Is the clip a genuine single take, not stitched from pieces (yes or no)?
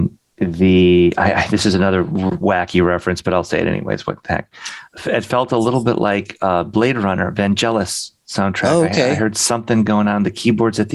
yes